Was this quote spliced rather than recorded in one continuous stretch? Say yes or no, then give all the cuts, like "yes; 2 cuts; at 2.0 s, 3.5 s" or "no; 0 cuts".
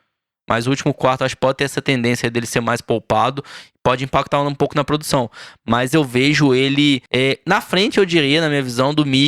yes; 1 cut; at 7.1 s